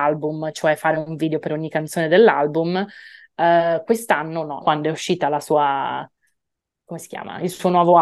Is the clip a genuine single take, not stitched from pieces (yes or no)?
no